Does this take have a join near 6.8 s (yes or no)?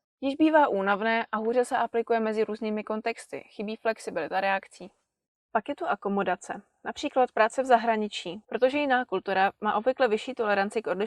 no